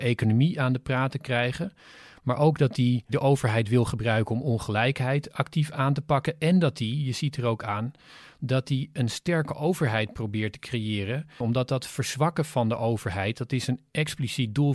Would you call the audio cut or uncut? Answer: cut